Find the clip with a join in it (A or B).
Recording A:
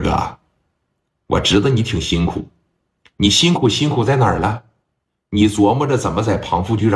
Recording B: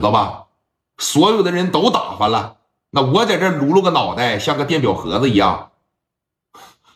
B